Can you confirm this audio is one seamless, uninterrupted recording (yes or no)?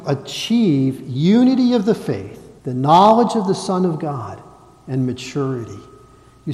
no